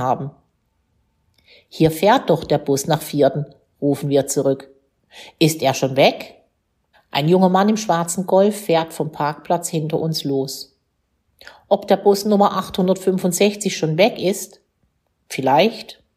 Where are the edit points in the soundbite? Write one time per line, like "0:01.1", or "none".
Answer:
0:06.9